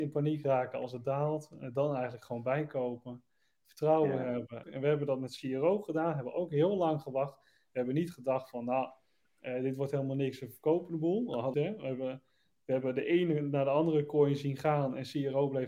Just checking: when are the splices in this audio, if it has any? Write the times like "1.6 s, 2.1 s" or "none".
4.6 s, 11.5 s